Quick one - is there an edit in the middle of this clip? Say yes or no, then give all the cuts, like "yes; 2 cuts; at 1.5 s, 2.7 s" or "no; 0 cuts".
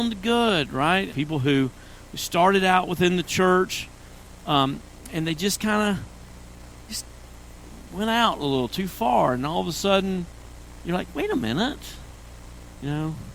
yes; 1 cut; at 1.1 s